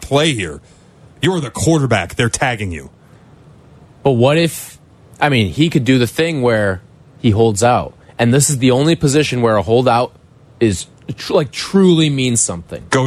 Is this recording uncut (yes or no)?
yes